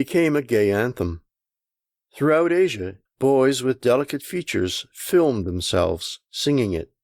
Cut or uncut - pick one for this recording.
cut